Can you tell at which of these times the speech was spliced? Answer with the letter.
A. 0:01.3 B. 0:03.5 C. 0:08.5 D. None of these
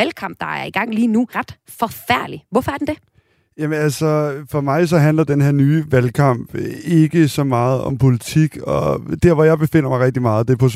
A